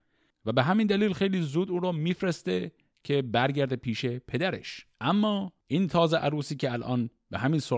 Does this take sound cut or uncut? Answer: cut